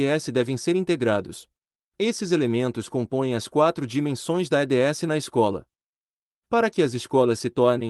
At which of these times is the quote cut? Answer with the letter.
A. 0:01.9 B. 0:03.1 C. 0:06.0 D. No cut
A